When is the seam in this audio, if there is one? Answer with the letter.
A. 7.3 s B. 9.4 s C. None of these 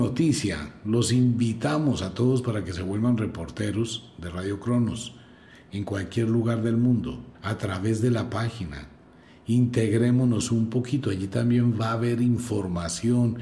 A